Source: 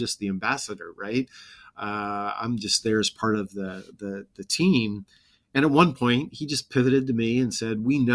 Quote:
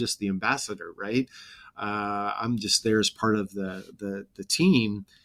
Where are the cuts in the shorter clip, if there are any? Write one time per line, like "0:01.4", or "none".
none